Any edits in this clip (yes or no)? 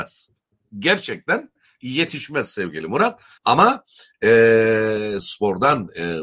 yes